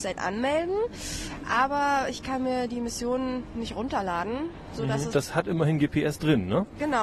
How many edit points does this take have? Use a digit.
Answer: 1